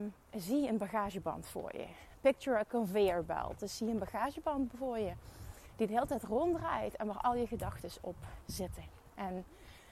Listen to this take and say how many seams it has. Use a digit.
0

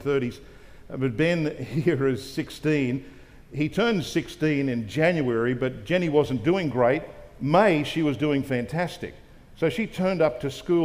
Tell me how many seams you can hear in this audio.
0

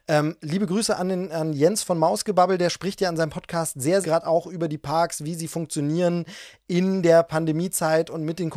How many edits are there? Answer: 1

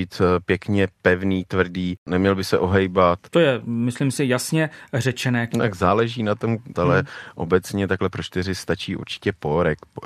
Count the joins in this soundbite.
2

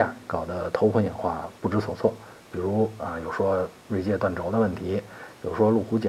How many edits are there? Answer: 0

